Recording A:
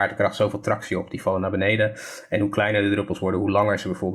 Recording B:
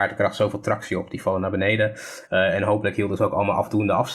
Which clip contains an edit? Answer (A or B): B